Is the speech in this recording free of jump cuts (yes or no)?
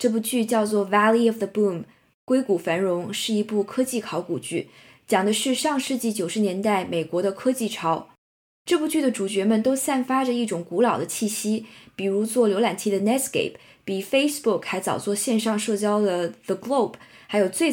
yes